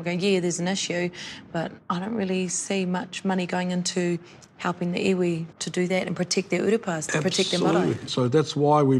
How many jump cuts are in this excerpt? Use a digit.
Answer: 2